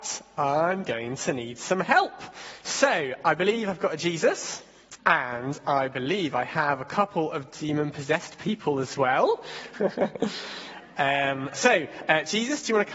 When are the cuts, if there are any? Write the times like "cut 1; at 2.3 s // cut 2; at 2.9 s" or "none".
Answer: cut 1; at 5.0 s // cut 2; at 9.7 s